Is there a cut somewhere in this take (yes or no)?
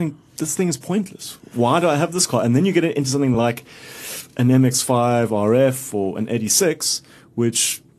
no